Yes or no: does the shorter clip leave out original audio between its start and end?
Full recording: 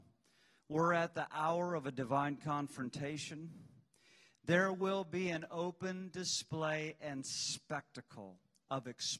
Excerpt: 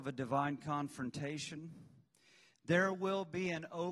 no